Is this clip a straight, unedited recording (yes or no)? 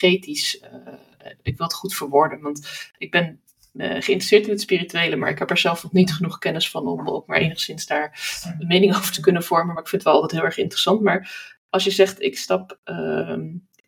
yes